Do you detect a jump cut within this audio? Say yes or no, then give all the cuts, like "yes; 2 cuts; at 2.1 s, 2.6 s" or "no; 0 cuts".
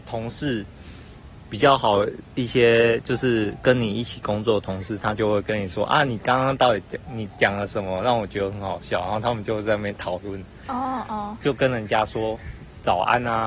yes; 1 cut; at 11.4 s